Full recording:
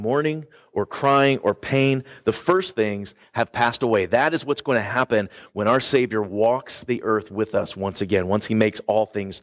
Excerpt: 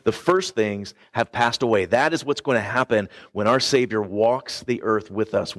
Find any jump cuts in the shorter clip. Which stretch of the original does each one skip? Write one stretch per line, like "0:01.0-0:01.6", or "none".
none

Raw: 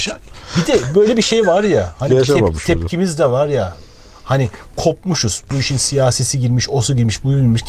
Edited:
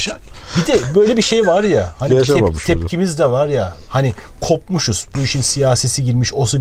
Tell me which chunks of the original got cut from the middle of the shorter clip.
0:03.9-0:04.2

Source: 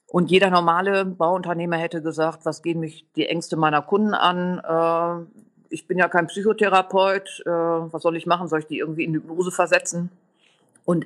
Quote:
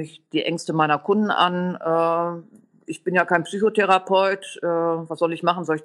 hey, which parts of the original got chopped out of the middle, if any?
none

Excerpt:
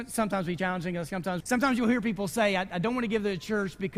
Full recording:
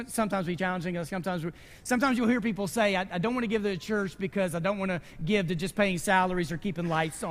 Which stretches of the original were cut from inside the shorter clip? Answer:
0:01.4-0:01.8

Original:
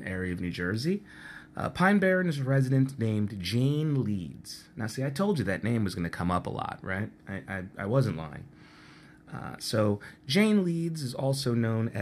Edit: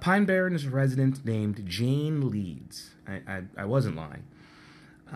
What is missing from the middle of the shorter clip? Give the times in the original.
0:04.7-0:07.2

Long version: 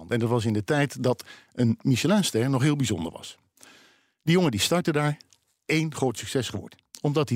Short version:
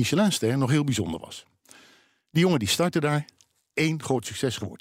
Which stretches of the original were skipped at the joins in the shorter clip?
none

